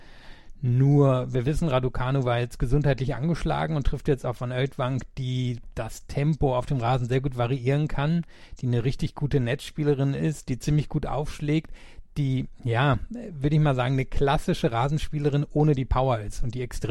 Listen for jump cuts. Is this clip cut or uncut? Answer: uncut